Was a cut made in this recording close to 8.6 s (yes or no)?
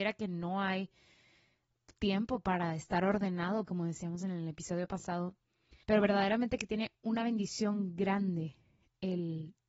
no